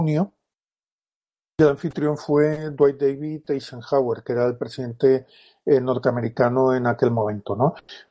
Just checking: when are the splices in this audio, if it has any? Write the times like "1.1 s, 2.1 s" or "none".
none